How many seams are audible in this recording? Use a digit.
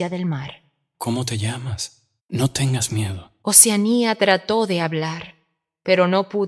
1